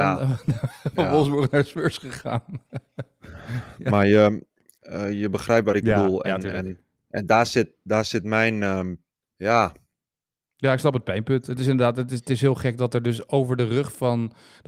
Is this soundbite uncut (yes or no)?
yes